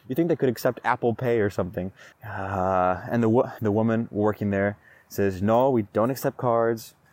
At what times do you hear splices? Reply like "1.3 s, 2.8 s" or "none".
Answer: 2.1 s, 3.6 s